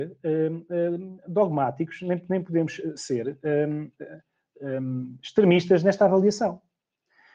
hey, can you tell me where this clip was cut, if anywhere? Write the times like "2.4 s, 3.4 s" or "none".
none